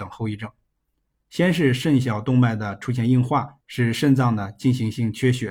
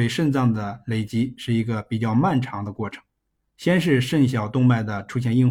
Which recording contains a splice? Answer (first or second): first